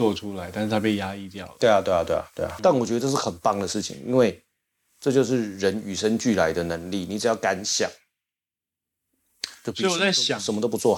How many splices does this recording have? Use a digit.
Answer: 1